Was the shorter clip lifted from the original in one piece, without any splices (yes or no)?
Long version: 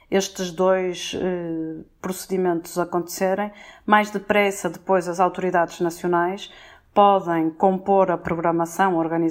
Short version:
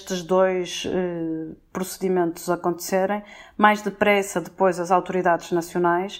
yes